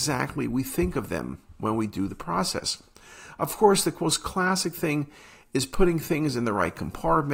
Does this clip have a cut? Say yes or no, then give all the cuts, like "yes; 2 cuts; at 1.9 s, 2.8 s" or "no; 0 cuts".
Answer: no; 0 cuts